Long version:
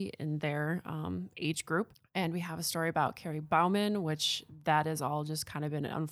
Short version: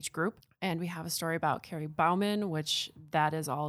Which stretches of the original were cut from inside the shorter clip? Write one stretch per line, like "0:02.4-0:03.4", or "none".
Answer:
none